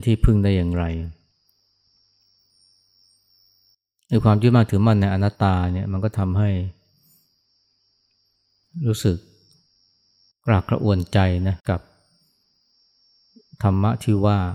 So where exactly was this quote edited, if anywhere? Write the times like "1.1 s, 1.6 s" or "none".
5.3 s, 11.6 s